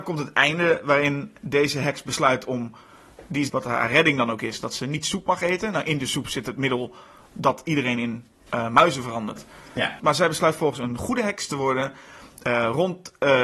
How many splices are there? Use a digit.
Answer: 2